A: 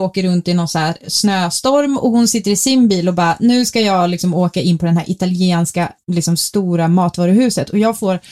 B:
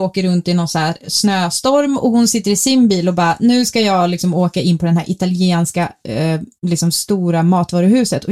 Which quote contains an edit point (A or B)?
A